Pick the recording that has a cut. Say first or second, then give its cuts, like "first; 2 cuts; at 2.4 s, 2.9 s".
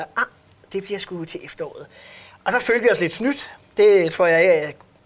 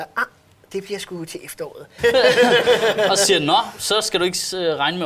second; 1 cut; at 2.0 s